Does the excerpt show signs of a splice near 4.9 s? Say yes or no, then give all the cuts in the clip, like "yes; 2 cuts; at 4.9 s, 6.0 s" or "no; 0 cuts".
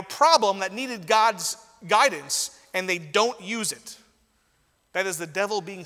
no; 0 cuts